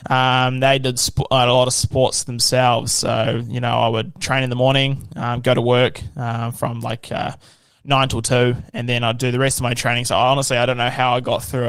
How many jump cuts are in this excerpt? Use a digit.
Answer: 0